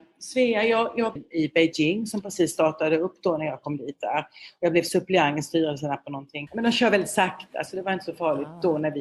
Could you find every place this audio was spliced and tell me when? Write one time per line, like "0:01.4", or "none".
0:01.2
0:06.5